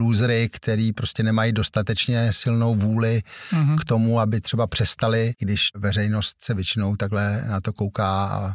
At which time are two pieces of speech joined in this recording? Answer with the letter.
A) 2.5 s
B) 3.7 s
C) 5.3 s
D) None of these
C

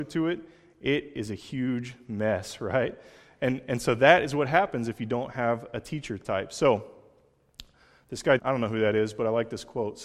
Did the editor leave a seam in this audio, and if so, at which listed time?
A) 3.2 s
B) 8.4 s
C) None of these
B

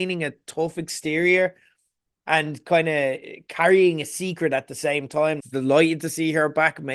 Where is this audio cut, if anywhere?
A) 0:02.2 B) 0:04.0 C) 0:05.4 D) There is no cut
C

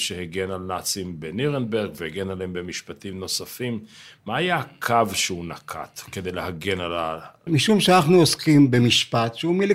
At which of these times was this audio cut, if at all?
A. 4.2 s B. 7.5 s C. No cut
B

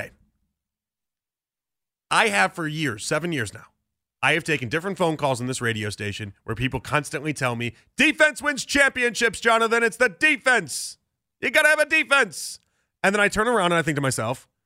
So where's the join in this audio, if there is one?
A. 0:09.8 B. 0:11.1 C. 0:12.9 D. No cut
D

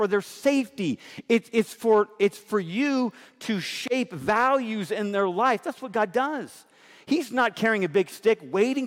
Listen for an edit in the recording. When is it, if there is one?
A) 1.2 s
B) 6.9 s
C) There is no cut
C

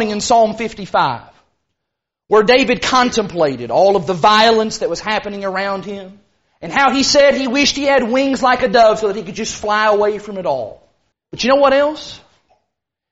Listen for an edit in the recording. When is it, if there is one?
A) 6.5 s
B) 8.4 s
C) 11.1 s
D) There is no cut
C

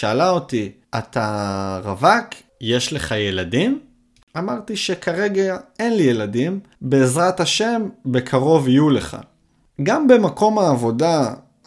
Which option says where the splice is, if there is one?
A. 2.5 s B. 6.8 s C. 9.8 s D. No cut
B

